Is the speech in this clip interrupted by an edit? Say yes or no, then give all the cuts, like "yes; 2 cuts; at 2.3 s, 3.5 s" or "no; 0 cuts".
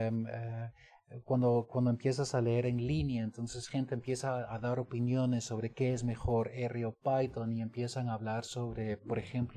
no; 0 cuts